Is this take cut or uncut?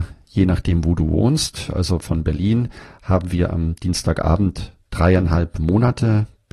uncut